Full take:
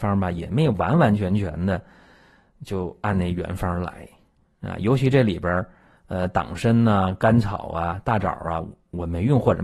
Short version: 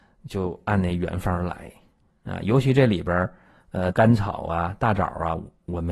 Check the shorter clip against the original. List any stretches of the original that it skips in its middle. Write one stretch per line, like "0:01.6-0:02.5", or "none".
0:06.3-0:07.2